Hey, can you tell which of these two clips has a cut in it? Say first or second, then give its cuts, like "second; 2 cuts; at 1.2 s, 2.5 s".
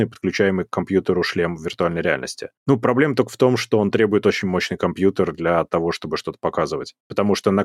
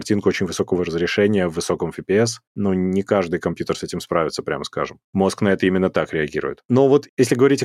second; 2 cuts; at 5.0 s, 6.6 s